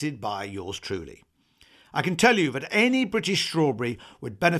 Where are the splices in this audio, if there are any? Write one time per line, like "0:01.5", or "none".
none